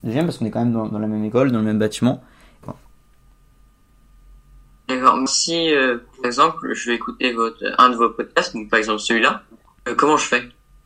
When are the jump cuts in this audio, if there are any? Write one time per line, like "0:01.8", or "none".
0:02.6
0:05.3